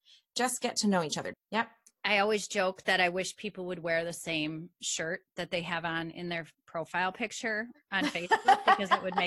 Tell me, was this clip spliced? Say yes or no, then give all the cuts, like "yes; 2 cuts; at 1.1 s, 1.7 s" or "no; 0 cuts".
yes; 1 cut; at 1.3 s